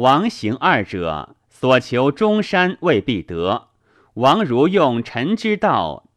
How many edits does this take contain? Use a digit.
0